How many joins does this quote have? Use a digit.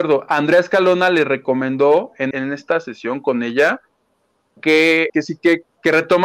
2